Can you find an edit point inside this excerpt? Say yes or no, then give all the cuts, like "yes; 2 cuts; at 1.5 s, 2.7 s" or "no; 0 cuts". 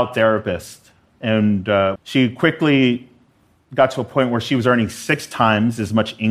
yes; 1 cut; at 2.0 s